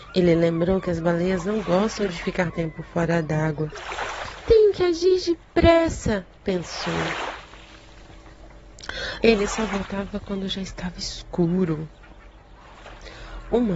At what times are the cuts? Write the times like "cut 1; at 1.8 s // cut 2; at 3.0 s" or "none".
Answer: cut 1; at 2.5 s // cut 2; at 9.2 s